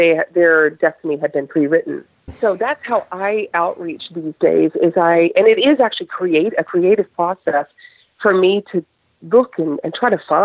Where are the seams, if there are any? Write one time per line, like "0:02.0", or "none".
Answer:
0:02.3